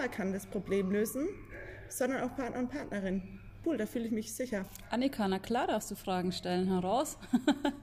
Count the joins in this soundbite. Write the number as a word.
one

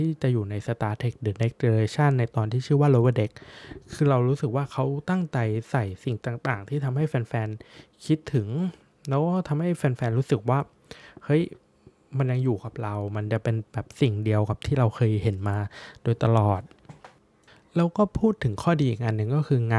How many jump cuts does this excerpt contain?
zero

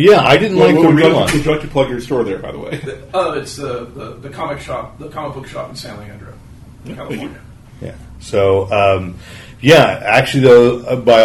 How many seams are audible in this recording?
zero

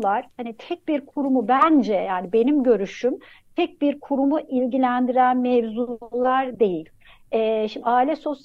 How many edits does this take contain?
zero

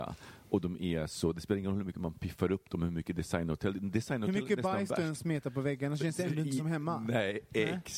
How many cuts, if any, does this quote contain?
zero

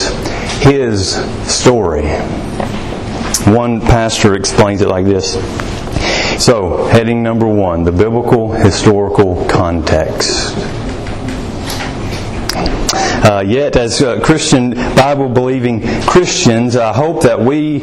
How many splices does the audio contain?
two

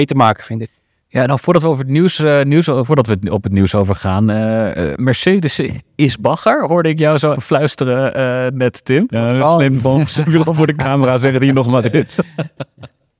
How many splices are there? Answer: two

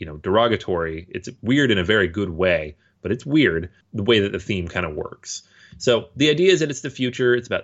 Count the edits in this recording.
zero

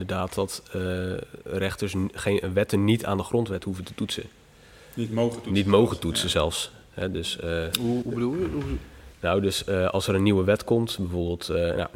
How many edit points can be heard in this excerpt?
one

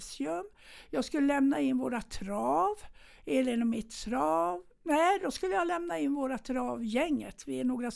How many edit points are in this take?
zero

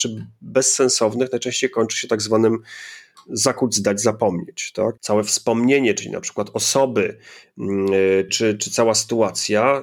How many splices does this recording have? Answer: two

